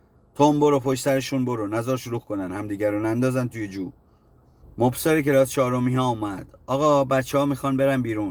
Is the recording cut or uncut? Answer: cut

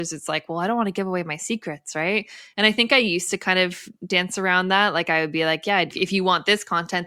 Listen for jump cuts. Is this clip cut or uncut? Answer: cut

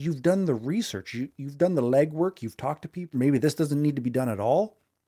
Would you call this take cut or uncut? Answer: cut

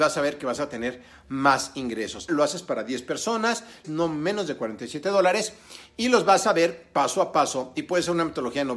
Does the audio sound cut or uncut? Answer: cut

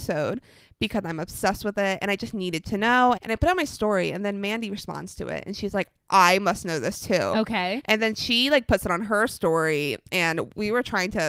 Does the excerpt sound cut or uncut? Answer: cut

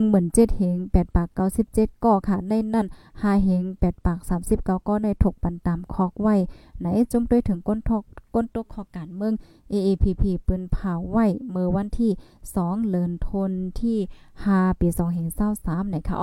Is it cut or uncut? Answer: uncut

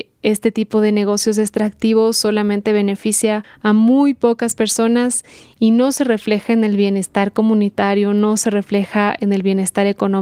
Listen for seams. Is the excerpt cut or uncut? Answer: uncut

